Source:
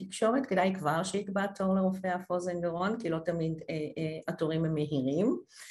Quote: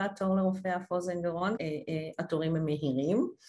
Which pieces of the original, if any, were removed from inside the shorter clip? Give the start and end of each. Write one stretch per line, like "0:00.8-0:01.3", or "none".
0:03.0-0:03.7